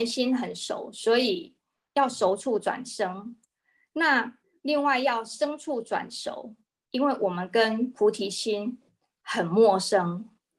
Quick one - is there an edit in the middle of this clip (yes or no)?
no